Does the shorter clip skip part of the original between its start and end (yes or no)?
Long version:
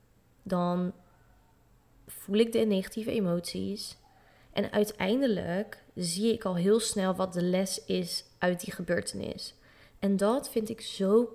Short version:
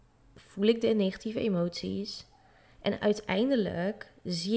no